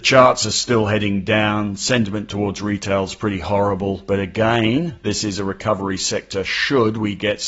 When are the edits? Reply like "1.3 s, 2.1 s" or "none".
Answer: none